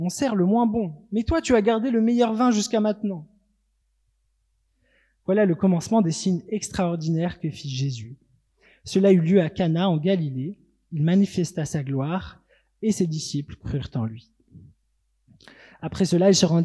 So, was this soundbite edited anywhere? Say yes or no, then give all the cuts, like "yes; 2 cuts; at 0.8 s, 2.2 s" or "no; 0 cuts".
no; 0 cuts